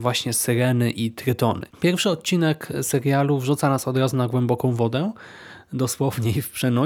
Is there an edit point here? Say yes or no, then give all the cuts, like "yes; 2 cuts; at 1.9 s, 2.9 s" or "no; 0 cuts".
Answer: yes; 1 cut; at 1.7 s